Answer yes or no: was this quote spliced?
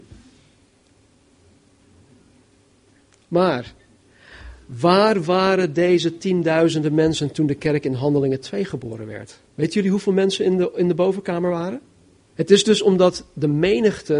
yes